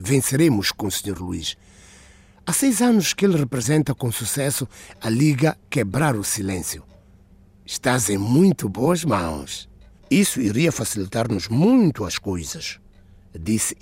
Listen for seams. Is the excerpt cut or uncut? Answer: cut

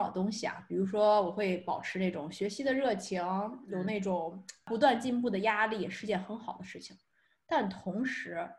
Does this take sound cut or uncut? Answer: uncut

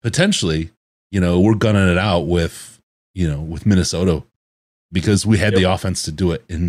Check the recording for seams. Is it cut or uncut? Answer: uncut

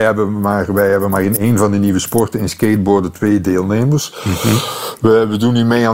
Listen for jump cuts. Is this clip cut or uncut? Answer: uncut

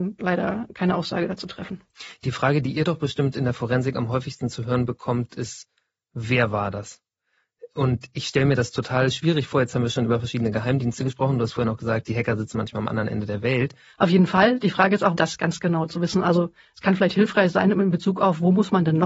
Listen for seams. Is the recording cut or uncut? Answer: cut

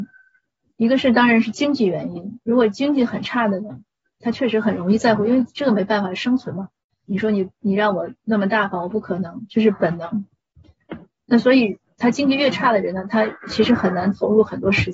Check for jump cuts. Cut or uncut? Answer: cut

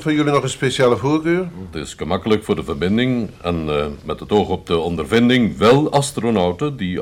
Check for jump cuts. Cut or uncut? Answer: cut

